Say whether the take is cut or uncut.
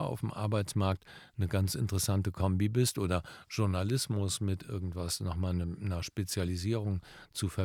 uncut